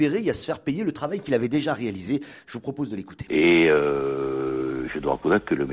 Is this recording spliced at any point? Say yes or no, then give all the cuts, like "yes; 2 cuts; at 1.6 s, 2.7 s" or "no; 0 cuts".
yes; 1 cut; at 3.3 s